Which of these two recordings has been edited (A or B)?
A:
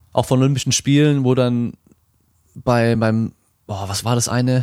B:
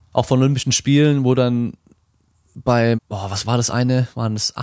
B